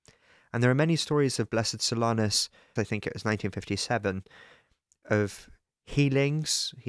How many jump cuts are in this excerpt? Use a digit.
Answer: 1